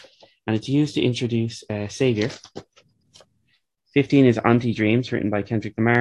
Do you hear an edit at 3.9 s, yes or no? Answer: yes